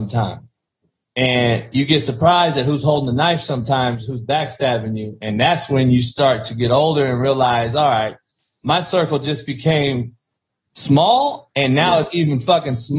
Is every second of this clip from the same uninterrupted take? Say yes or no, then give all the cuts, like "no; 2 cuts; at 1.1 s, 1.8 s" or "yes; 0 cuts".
yes; 0 cuts